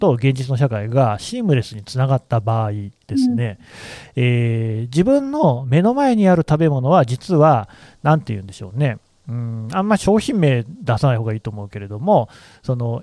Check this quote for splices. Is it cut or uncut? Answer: uncut